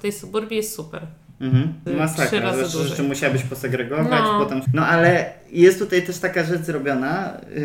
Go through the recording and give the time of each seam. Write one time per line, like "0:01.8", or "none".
0:01.9
0:04.7